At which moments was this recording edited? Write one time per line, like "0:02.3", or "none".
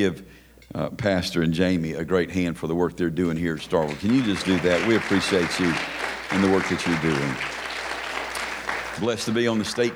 none